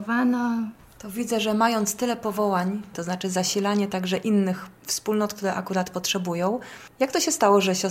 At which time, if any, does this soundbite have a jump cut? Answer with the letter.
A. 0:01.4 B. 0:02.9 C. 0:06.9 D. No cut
B